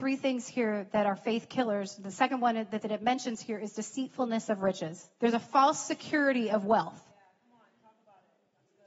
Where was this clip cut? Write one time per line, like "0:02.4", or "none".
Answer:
0:05.2